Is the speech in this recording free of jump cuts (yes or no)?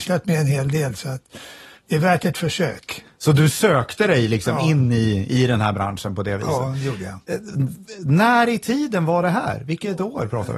yes